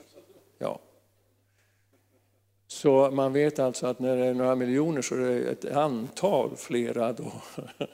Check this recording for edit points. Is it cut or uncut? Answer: uncut